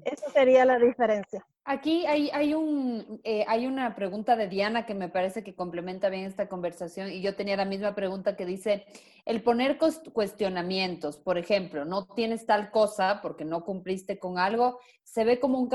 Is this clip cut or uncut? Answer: cut